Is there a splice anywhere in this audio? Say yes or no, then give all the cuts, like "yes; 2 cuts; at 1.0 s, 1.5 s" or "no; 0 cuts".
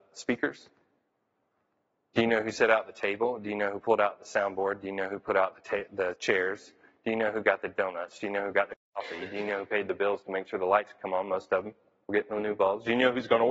no; 0 cuts